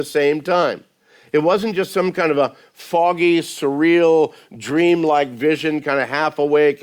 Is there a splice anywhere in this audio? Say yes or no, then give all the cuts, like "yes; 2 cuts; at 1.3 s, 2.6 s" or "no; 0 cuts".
no; 0 cuts